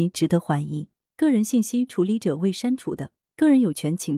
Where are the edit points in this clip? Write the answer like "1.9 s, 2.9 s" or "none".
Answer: 1.1 s